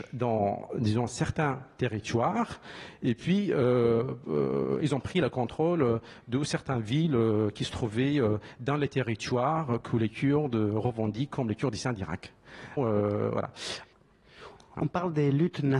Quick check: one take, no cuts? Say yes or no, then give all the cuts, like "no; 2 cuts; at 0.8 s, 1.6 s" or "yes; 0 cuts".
no; 1 cut; at 12.8 s